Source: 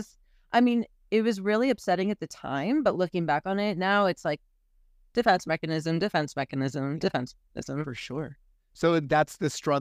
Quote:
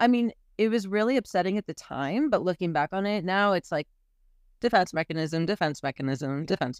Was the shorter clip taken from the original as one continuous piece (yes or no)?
yes